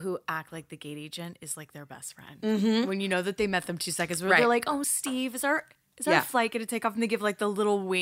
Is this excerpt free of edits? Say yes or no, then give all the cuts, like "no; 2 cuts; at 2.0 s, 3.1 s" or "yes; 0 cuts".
yes; 0 cuts